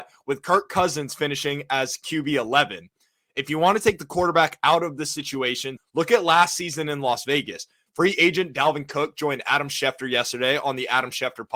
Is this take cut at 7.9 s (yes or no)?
yes